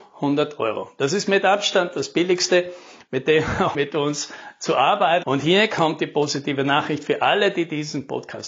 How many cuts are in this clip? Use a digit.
2